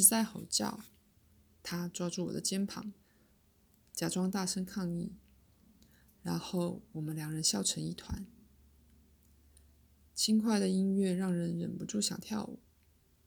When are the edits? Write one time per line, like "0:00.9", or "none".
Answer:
none